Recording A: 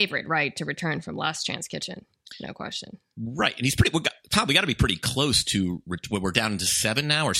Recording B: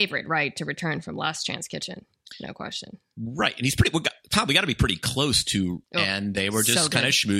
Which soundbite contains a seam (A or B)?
B